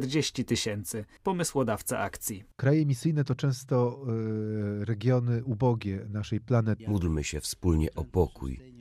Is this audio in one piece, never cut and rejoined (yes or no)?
no